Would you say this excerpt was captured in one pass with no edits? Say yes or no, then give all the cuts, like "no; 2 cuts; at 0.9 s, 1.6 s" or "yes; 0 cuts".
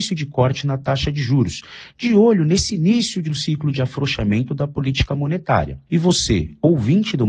no; 1 cut; at 5.9 s